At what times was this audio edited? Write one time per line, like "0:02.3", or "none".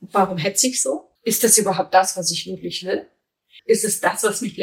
0:01.2
0:03.6